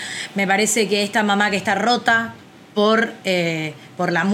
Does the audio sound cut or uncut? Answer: uncut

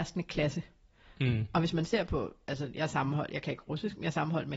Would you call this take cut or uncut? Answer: uncut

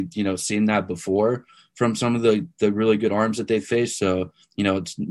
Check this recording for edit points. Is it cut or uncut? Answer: uncut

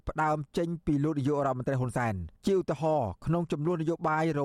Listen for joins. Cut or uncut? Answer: cut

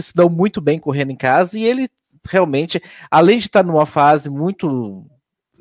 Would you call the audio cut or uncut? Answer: uncut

